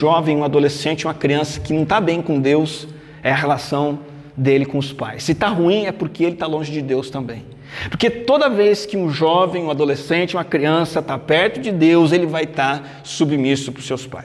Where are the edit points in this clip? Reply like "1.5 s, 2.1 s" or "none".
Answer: none